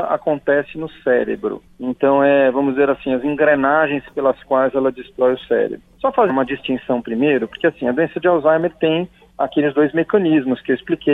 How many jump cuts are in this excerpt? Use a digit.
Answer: 1